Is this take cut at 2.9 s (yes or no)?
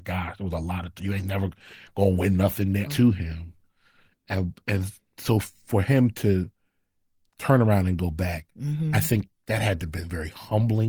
yes